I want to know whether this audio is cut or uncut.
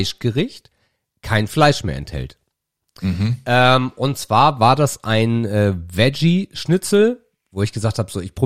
uncut